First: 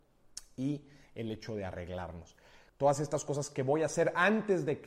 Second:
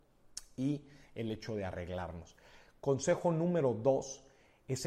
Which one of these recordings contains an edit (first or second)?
first